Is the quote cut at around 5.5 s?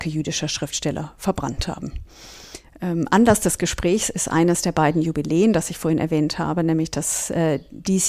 no; 1 cut; at 2.6 s

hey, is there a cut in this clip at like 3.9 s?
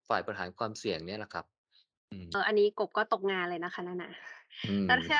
no; 1 cut; at 2.3 s

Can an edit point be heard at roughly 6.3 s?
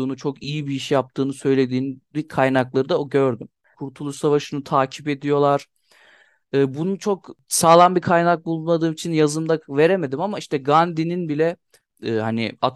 no; 1 cut; at 3.7 s

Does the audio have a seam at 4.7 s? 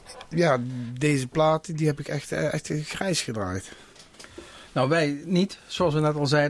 no; 0 cuts

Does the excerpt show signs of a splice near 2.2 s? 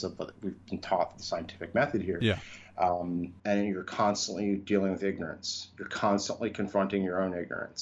no; 1 cut; at 3.4 s

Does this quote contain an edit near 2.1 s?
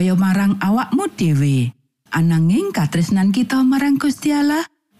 yes; 1 cut; at 2.1 s

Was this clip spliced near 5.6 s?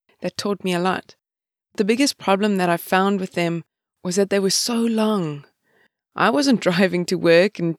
no; 0 cuts

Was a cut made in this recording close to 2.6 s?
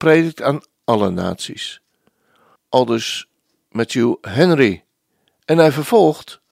yes; 1 cut; at 2.6 s

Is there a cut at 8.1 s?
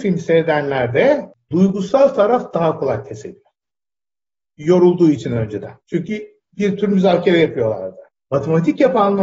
no; 1 cut; at 5.8 s

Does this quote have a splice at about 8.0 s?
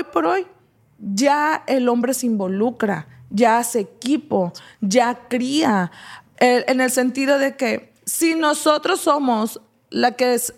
yes; 2 cuts; at 6.3 s, 8.0 s

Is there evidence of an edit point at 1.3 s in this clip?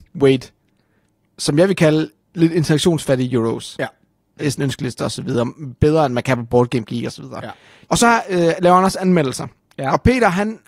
no; 1 cut; at 4.4 s

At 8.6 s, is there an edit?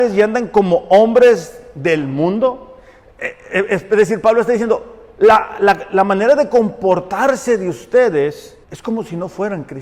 yes; 1 cut; at 8.6 s

